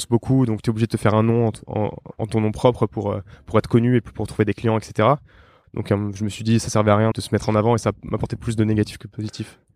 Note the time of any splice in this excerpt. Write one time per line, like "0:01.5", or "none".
0:05.6
0:07.1